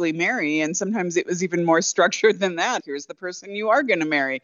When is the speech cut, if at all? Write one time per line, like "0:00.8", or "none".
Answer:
0:02.8